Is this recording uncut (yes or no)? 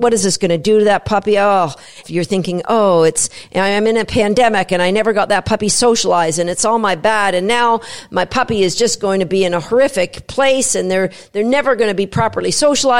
no